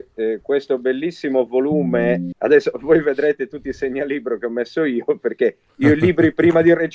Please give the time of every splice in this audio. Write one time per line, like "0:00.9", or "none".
0:02.3